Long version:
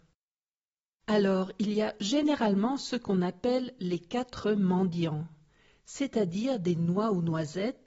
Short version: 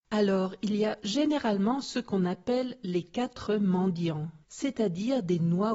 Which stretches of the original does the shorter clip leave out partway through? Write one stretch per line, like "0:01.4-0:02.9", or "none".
0:05.4-0:05.8